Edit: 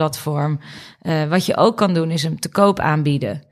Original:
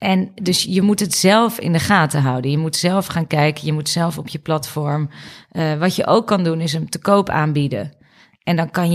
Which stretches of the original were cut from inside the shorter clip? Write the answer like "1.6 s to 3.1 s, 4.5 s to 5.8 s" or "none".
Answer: none

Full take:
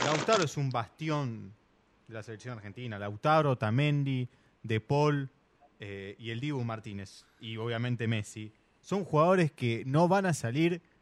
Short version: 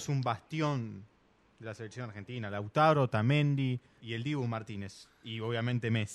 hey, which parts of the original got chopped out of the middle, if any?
4.5 s to 6.2 s

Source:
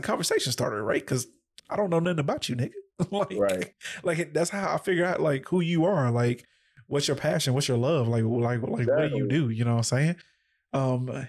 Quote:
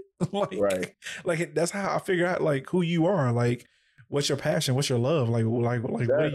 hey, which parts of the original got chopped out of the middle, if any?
none

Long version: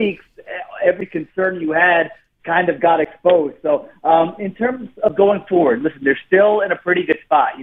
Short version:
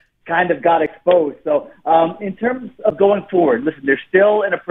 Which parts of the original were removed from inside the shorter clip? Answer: none

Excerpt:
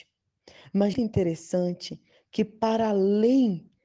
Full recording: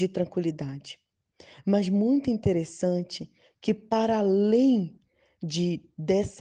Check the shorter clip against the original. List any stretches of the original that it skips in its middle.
1.9 s to 2.2 s

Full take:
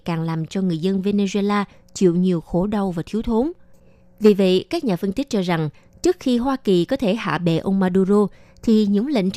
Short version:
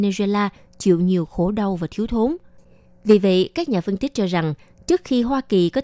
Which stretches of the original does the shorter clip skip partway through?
none

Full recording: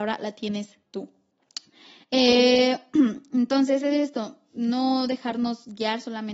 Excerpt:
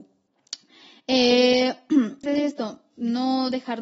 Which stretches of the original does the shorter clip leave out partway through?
3.3 s to 3.8 s

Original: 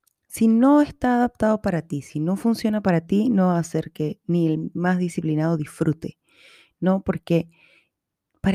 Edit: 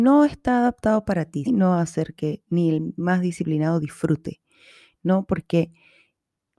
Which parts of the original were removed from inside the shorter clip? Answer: 2.0 s to 3.2 s

